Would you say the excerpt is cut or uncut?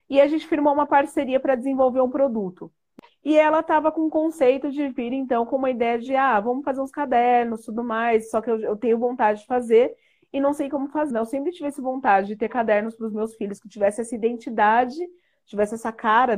cut